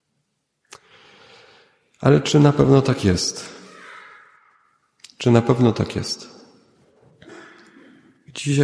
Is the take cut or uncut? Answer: uncut